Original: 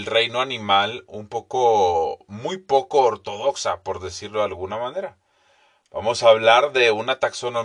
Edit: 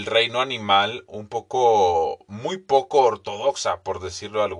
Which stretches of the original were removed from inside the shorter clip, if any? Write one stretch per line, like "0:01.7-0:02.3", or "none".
none